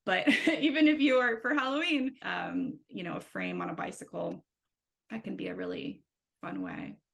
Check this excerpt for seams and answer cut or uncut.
cut